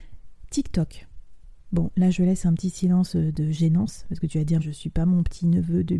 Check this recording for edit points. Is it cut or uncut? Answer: cut